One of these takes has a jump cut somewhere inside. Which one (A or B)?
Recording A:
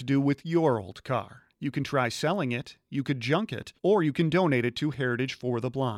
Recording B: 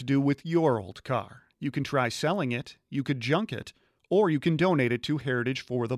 A